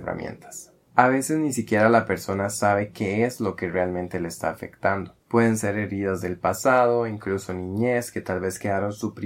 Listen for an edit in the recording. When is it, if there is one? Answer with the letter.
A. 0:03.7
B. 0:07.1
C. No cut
C